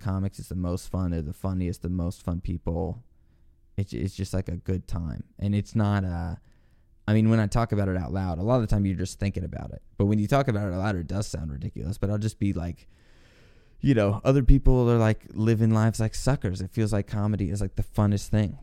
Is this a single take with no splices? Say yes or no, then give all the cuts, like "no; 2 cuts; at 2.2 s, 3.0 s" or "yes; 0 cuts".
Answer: yes; 0 cuts